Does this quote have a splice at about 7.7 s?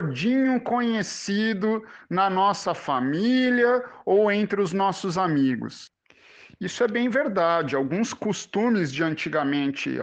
no; 0 cuts

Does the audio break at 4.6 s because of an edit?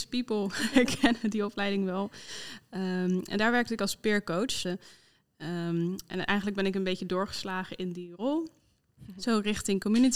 yes; 1 cut; at 4.6 s

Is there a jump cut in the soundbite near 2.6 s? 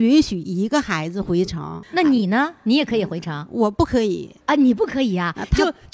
no; 0 cuts

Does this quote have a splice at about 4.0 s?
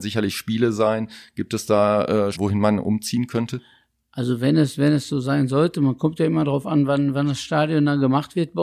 no; 1 cut; at 2.3 s

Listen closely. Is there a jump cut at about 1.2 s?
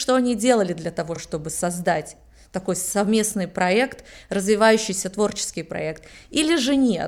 no; 0 cuts

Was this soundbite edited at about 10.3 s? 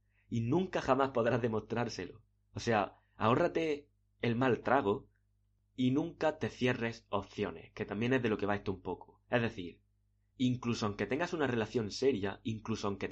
yes; 1 cut; at 10.3 s

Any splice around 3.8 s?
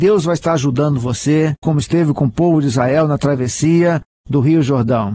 no; 1 cut; at 1.6 s

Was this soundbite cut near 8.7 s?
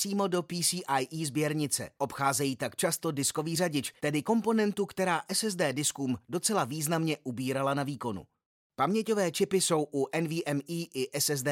no; 2 cuts; at 2.0 s, 4.0 s

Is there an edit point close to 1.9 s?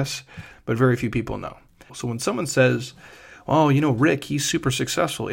yes; 1 cut; at 1.9 s

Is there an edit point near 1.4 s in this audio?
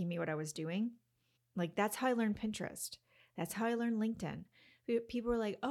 yes; 1 cut; at 1.4 s

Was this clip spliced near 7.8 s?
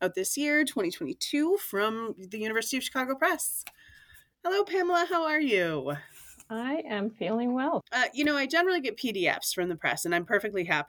yes; 1 cut; at 7.8 s

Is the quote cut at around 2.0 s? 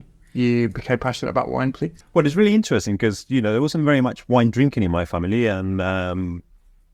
yes; 1 cut; at 2.0 s

